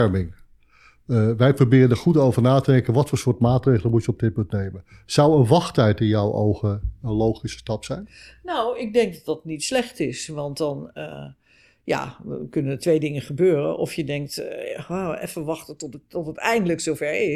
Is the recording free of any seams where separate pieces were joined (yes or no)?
yes